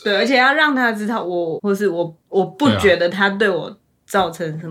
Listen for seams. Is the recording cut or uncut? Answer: cut